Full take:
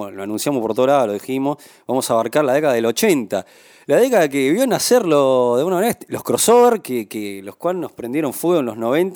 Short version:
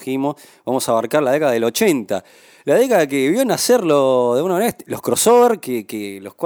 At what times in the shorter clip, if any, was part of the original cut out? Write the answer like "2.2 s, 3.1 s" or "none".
none